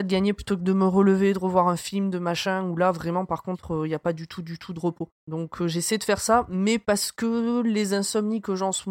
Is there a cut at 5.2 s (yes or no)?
yes